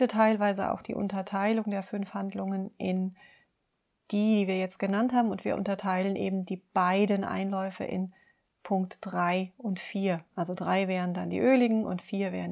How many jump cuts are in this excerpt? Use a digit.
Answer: 0